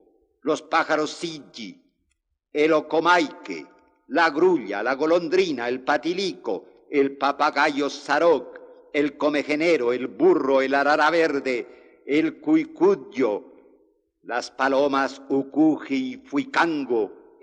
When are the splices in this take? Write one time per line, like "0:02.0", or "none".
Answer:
none